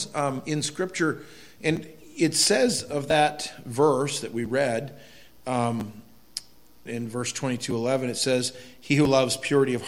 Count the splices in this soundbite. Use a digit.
1